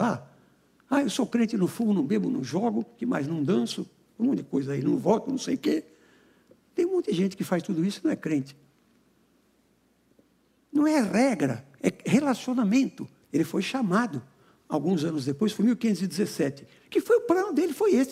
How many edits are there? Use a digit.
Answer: 2